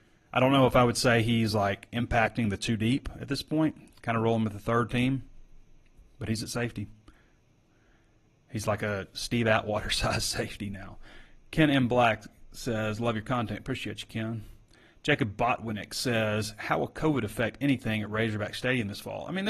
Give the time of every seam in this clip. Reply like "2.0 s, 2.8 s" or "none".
none